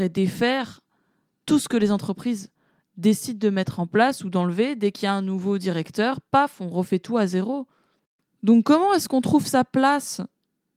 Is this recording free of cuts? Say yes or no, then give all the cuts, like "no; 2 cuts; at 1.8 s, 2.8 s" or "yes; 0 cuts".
yes; 0 cuts